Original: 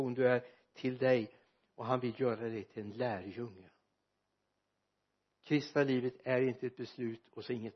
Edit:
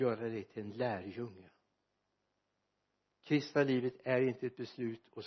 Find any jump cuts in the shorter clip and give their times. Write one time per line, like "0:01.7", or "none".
none